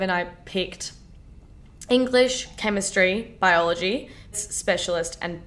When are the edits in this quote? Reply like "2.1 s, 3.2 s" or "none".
4.3 s